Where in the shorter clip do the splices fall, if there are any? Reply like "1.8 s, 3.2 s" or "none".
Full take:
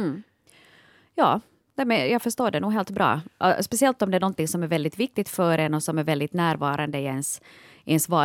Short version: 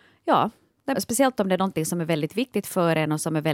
0.9 s